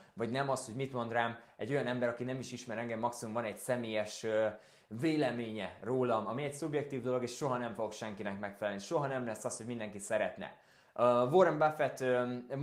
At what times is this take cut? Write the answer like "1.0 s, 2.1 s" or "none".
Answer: none